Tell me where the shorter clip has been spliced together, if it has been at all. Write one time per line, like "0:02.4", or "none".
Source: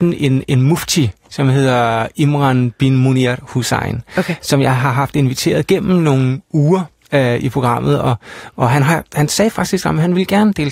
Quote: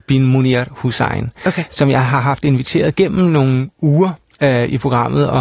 none